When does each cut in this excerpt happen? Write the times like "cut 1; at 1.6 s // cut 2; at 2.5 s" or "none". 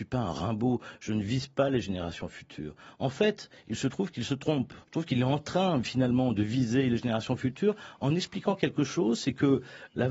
cut 1; at 4.8 s